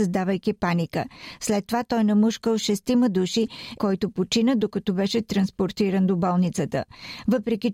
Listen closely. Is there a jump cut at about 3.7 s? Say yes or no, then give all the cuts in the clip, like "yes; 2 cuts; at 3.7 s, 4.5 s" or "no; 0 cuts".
yes; 1 cut; at 3.7 s